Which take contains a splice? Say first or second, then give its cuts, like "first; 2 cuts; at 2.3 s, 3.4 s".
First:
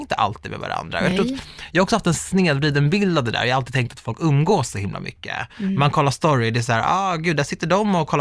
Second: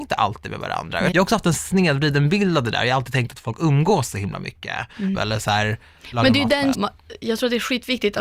second; 3 cuts; at 1.1 s, 5.1 s, 6.7 s